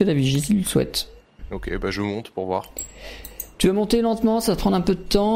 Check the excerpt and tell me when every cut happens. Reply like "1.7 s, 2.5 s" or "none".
none